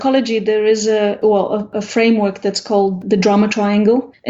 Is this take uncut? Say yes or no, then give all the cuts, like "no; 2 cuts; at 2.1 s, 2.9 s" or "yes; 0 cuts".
yes; 0 cuts